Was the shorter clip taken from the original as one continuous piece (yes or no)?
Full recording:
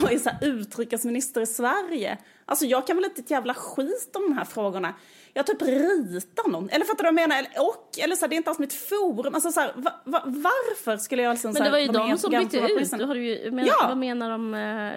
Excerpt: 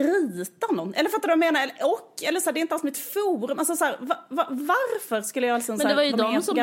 yes